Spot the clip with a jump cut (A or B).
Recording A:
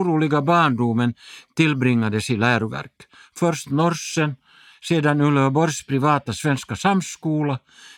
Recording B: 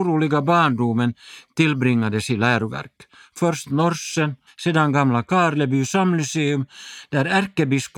B